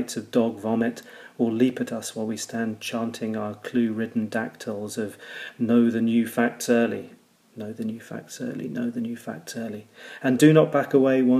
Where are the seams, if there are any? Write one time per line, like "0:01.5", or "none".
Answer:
none